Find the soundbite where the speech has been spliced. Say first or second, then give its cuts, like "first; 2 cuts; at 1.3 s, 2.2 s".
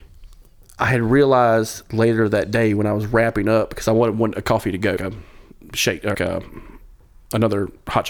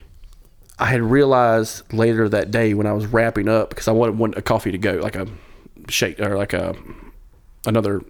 first; 2 cuts; at 5.0 s, 6.1 s